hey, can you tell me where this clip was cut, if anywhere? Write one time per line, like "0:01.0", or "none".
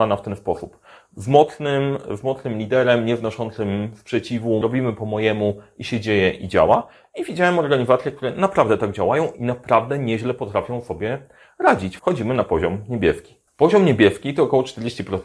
0:04.6
0:12.0